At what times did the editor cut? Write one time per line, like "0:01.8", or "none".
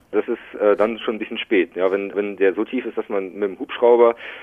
0:02.1